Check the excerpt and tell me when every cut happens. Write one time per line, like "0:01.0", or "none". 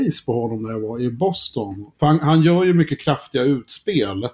0:01.9